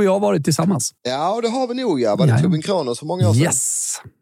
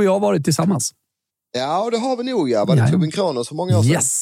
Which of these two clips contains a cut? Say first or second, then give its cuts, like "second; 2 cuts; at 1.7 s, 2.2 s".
first; 1 cut; at 1.0 s